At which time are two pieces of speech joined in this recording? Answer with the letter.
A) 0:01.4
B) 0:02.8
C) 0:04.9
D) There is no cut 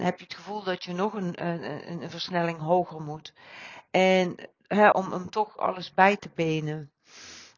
C